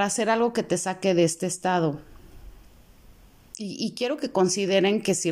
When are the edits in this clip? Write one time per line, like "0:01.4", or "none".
none